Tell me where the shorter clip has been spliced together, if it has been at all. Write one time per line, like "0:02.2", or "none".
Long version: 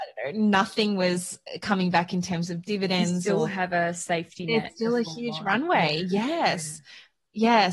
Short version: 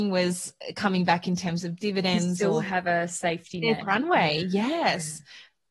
0:03.8